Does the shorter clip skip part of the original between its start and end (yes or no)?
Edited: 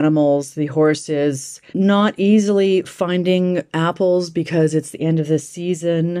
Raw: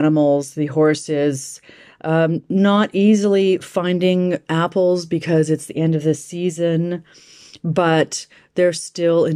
yes